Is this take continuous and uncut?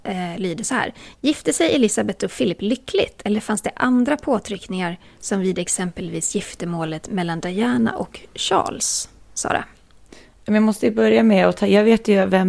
yes; 0 cuts

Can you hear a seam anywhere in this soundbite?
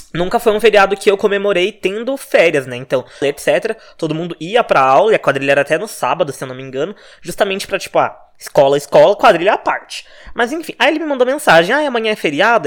yes; 1 cut; at 3.2 s

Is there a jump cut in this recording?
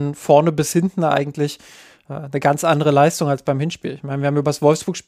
no; 0 cuts

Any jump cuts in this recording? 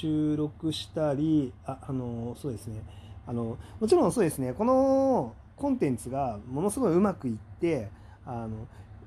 yes; 1 cut; at 3.2 s

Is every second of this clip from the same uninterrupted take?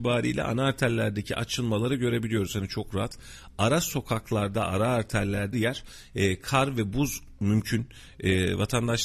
no; 1 cut; at 5.5 s

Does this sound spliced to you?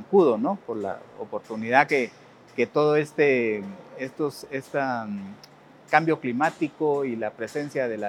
no; 0 cuts

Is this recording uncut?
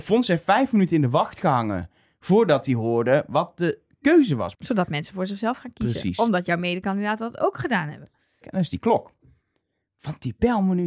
no; 2 cuts; at 4.5 s, 8.4 s

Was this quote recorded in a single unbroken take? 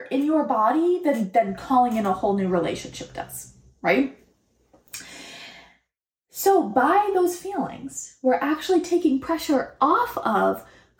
yes; 0 cuts

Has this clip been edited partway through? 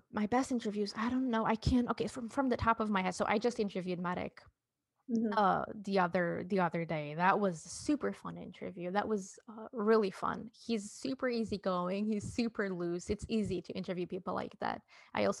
no; 0 cuts

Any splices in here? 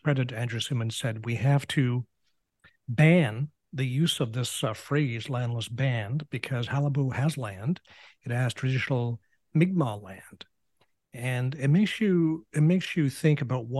no; 0 cuts

